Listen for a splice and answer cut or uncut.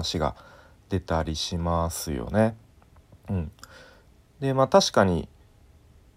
uncut